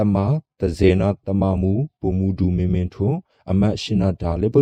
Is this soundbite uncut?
no; 1 cut; at 1.2 s

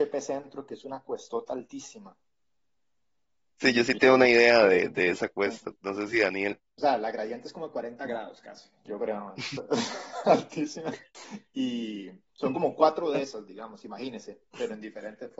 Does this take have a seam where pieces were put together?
yes; 1 cut; at 6.6 s

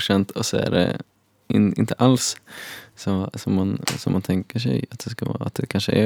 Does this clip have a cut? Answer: no; 0 cuts

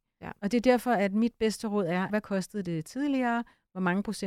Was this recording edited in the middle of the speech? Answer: yes; 1 cut; at 2.1 s

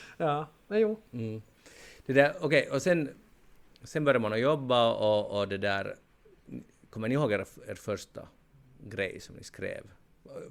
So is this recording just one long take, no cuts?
yes; 0 cuts

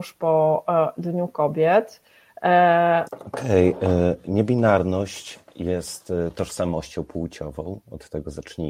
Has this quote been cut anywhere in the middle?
yes; 1 cut; at 3.1 s

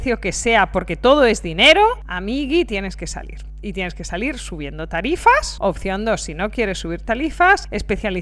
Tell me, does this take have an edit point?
yes; 1 cut; at 5.6 s

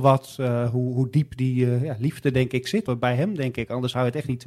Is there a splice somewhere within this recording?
yes; 1 cut; at 2.9 s

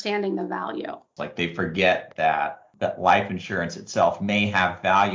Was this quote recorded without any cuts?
no; 1 cut; at 1.2 s

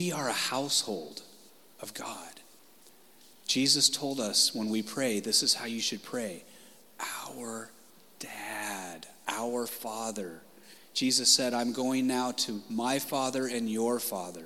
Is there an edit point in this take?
no; 0 cuts

